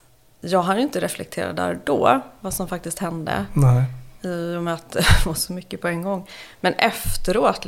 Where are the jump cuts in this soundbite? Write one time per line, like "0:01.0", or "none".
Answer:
none